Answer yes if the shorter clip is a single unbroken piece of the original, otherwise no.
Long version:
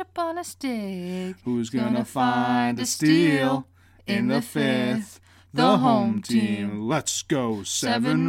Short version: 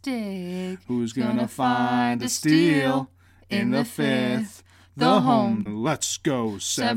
no